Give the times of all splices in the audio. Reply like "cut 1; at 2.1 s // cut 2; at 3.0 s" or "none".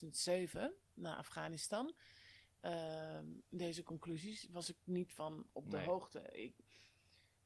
cut 1; at 3.4 s

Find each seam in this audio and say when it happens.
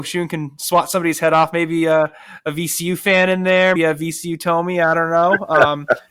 cut 1; at 3.8 s

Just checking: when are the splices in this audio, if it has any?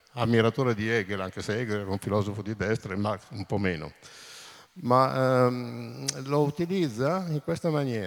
none

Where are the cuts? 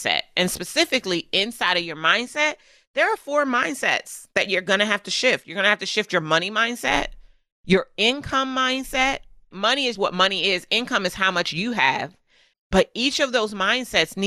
cut 1; at 9.9 s // cut 2; at 12.5 s

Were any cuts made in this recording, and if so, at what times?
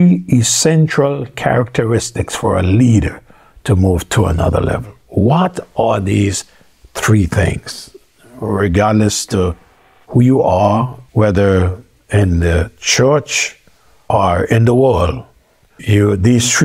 cut 1; at 11.1 s

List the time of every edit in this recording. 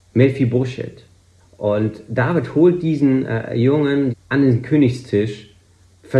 cut 1; at 1.4 s // cut 2; at 4.1 s

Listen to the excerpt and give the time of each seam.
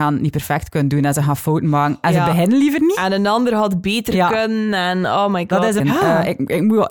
cut 1; at 5.8 s

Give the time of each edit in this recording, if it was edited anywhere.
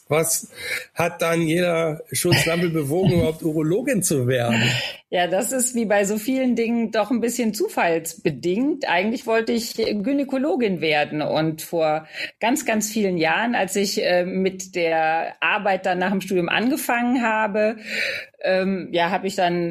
none

